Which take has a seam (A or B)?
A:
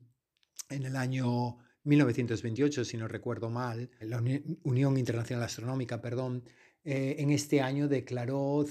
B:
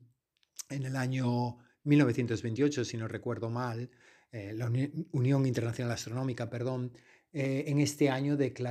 A